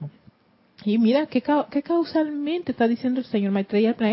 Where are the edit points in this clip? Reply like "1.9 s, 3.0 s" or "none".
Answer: none